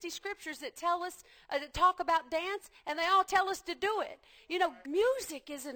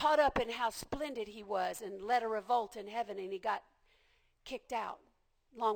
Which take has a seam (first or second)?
first